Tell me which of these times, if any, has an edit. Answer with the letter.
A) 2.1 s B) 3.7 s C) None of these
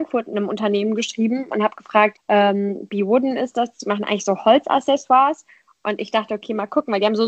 A